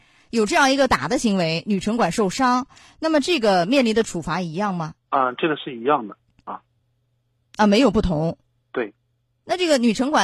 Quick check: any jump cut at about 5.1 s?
yes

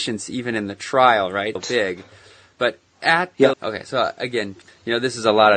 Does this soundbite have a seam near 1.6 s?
yes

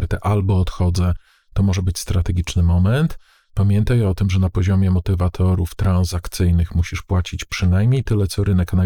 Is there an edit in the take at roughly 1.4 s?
no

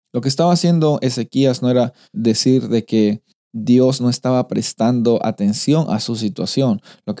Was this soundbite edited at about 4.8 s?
no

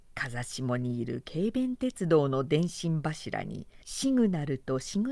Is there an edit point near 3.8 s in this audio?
yes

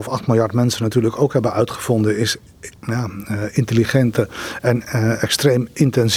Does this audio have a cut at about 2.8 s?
yes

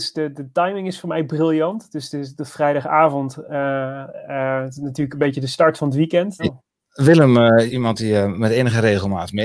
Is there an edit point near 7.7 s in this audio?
yes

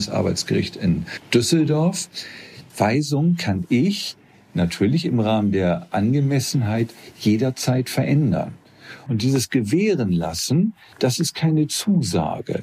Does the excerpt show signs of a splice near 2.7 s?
yes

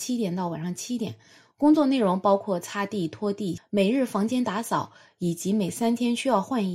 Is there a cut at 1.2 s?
no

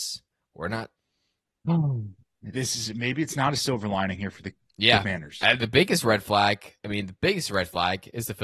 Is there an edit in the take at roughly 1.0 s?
yes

